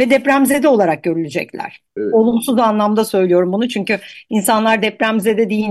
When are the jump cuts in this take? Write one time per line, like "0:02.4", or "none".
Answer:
0:02.0